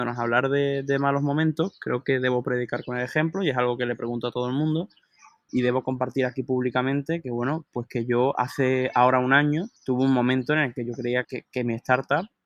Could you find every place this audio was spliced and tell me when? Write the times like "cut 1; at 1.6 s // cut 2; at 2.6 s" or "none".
cut 1; at 5.5 s // cut 2; at 9.8 s // cut 3; at 11.2 s